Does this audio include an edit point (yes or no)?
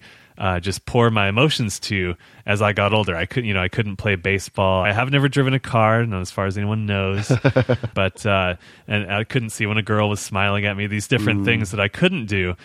yes